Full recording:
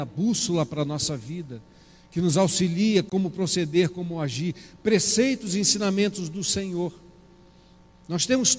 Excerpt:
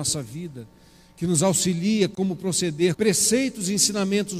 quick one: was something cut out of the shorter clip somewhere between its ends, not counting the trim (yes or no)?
yes